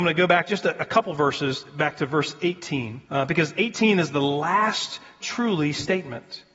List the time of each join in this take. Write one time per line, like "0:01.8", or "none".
0:03.1
0:05.2